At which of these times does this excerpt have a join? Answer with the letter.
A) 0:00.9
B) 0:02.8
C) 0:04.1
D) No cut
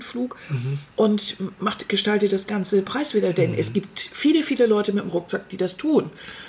A